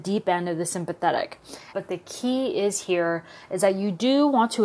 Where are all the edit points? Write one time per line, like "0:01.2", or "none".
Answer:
0:01.7